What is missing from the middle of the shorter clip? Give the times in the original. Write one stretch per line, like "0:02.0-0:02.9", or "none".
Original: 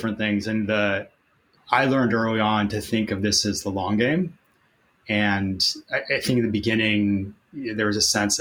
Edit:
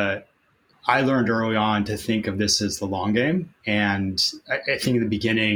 0:04.4-0:05.0